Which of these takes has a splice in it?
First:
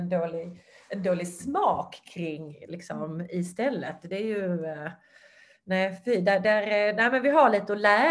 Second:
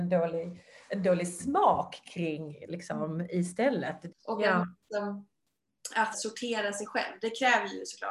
second; 2 cuts; at 4.1 s, 6.1 s

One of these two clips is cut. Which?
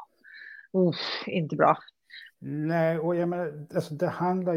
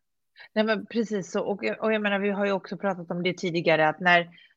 first; 1 cut; at 2.3 s

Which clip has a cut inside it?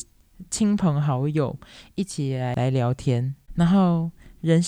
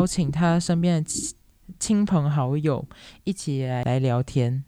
first; 1 cut; at 3.5 s

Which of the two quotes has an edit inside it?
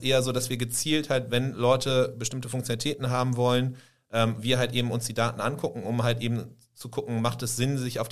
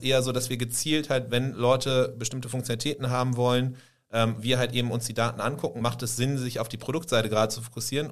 second; 1 cut; at 5.8 s

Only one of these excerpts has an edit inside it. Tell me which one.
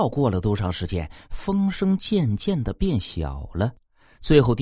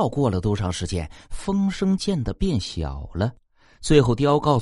second; 1 cut; at 2.0 s

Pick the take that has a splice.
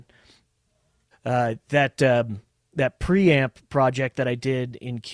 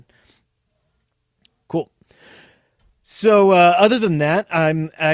first; 1 cut; at 1.1 s

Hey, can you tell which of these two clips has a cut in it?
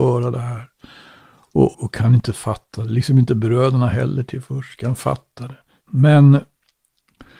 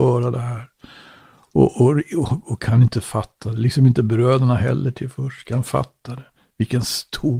first; 2 cuts; at 1.7 s, 5.8 s

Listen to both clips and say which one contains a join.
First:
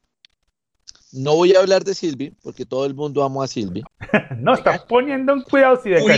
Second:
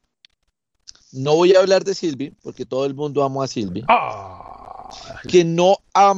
first; 1 cut; at 3.8 s

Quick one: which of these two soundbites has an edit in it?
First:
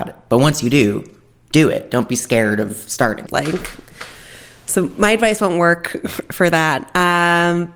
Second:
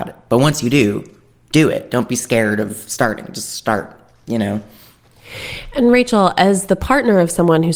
first; 1 cut; at 3.3 s

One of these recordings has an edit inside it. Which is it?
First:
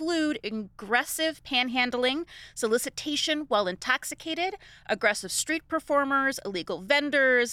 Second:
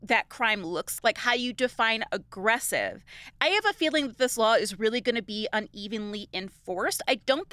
second; 1 cut; at 1.0 s

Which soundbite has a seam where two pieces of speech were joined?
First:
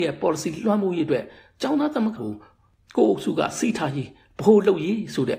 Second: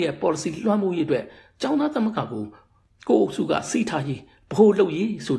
first; 1 cut; at 2.2 s

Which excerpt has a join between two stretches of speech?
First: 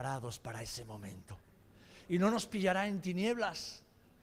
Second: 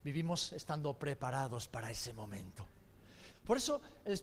second; 1 cut; at 3.3 s

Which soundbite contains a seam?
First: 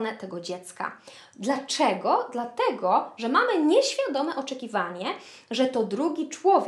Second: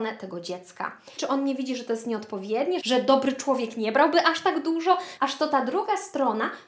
second; 3 cuts; at 1.2 s, 2.8 s, 5.2 s

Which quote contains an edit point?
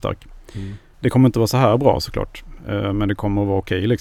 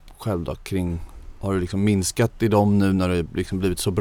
first; 1 cut; at 0.9 s

